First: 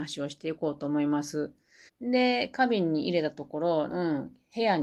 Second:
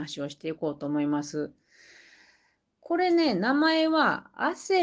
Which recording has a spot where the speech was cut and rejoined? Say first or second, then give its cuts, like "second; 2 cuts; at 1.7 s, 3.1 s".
first; 2 cuts; at 1.9 s, 3.9 s